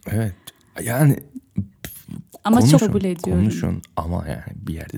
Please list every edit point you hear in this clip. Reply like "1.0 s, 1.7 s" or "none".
2.8 s